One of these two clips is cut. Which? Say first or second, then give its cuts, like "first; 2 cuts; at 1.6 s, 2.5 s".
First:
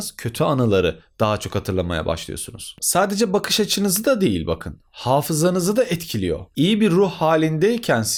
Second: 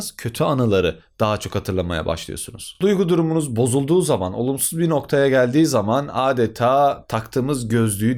first; 1 cut; at 2.8 s